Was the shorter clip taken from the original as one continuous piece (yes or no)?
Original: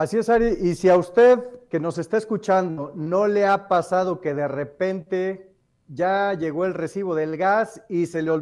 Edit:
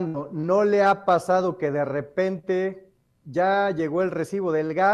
yes